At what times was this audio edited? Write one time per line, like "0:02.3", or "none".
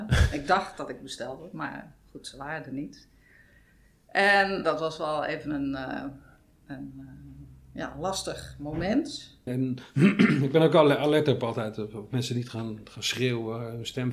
0:04.6
0:09.5